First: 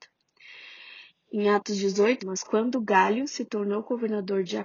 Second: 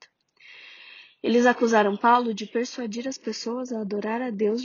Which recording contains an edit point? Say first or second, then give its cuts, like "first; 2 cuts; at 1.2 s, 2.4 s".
first; 2 cuts; at 1.1 s, 2.2 s